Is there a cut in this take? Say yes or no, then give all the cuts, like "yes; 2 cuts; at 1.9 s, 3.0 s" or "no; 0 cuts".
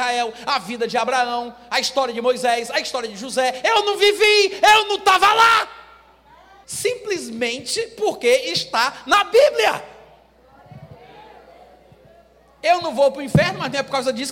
yes; 1 cut; at 6.6 s